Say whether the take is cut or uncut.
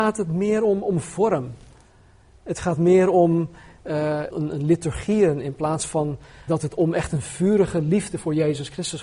cut